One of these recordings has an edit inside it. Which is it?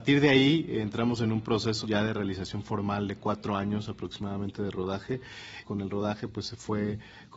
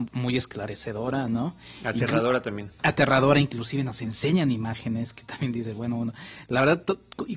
first; 2 cuts; at 1.8 s, 5.6 s

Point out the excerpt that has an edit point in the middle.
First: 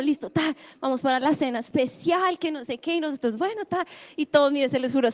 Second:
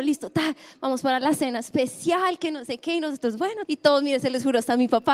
second; 1 cut; at 3.7 s

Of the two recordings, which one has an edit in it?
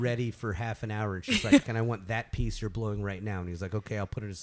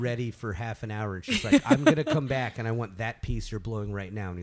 first; 1 cut; at 1.6 s

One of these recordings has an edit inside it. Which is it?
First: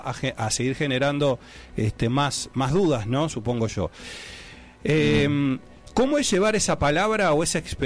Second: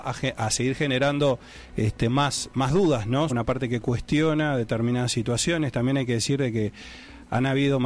second; 1 cut; at 3.3 s

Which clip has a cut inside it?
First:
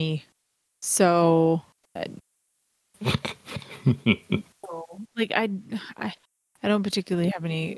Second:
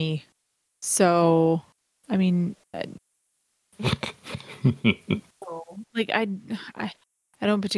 first; 1 cut; at 1.8 s

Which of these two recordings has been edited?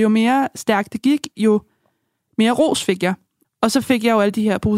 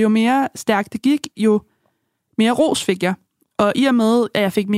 first; 1 cut; at 3.4 s

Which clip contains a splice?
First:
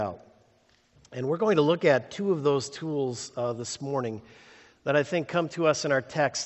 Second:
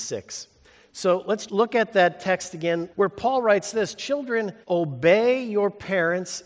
second; 3 cuts; at 1.5 s, 2.9 s, 4.6 s

